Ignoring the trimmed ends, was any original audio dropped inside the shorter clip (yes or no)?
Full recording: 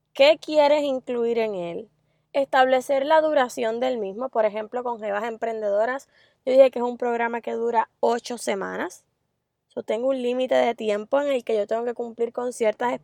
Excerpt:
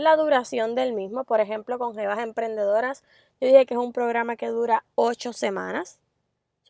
no